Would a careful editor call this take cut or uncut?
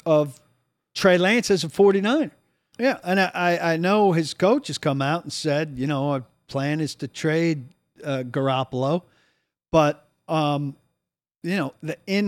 cut